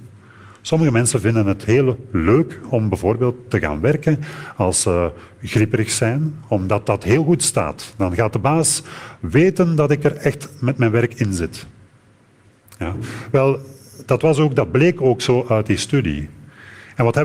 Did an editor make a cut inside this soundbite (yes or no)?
no